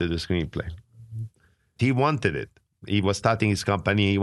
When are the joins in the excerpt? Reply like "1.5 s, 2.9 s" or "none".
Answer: 1.8 s